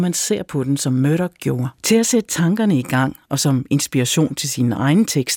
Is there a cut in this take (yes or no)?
yes